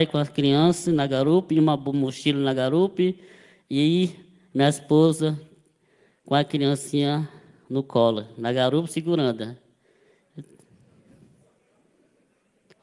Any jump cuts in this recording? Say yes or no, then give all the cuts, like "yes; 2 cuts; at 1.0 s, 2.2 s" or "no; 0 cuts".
no; 0 cuts